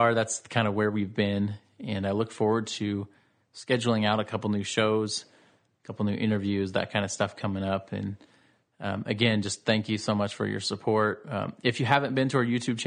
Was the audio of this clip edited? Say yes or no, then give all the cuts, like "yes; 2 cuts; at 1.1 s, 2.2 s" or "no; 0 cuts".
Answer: no; 0 cuts